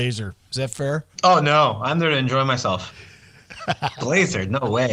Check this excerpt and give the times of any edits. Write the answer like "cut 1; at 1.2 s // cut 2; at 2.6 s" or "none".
cut 1; at 1.1 s // cut 2; at 3.9 s